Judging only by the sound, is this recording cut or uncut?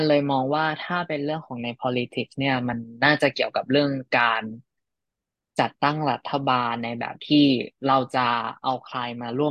uncut